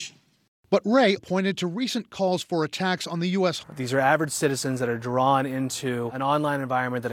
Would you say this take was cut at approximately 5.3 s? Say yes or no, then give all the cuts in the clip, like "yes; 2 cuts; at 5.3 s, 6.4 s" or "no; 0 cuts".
no; 2 cuts; at 1.2 s, 3.6 s